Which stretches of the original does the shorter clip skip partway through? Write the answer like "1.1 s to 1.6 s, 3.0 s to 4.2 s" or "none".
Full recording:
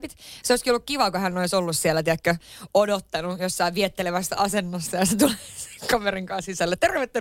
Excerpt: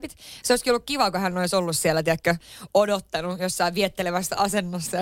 none